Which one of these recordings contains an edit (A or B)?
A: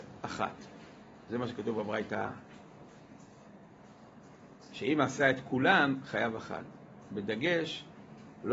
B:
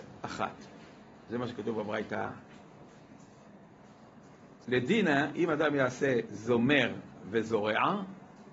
B